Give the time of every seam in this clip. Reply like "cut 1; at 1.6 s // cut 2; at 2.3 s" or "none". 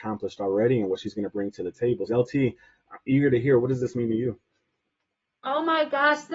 cut 1; at 2.1 s